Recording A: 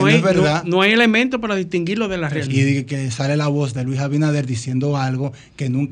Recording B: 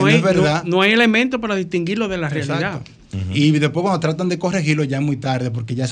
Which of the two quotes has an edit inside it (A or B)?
A